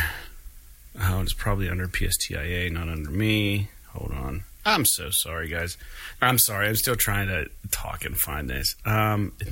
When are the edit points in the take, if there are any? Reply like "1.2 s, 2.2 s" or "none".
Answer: 6.2 s